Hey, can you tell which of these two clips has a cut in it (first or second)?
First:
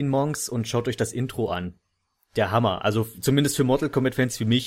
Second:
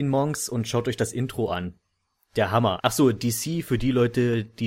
second